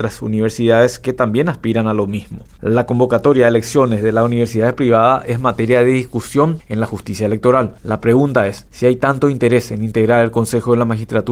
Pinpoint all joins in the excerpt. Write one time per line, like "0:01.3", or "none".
none